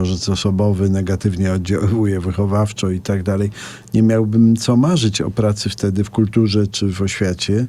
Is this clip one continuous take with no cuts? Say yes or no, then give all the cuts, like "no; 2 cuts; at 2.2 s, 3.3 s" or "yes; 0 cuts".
yes; 0 cuts